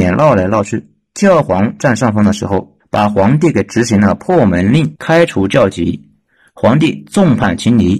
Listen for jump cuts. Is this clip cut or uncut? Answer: uncut